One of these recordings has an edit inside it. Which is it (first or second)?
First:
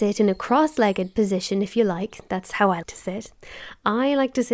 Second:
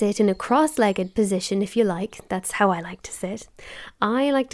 first